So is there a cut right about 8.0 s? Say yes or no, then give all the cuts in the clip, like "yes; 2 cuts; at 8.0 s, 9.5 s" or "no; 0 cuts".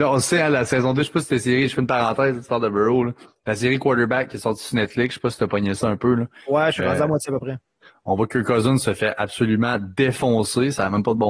no; 0 cuts